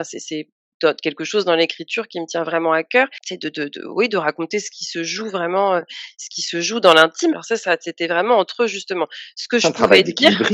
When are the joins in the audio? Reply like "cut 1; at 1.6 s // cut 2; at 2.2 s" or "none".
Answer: cut 1; at 7.3 s